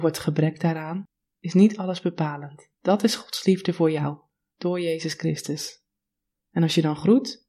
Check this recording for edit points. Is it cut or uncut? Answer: cut